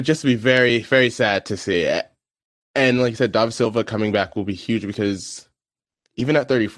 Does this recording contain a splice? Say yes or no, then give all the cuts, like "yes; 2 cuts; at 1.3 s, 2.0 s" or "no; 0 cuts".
no; 0 cuts